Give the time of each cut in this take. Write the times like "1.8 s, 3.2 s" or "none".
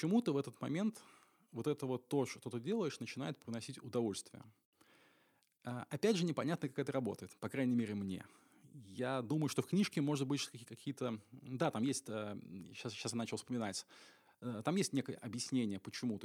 none